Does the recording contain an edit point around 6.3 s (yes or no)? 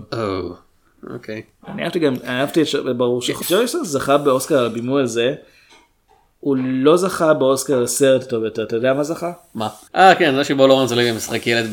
no